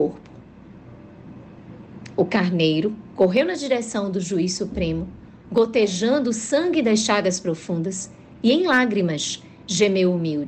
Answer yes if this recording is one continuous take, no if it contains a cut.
yes